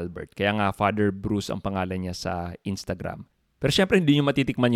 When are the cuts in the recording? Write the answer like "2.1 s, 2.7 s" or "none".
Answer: none